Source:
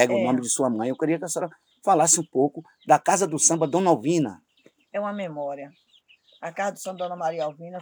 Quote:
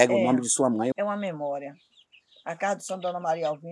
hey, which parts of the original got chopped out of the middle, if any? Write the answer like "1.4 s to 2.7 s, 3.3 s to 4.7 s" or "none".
0.9 s to 4.9 s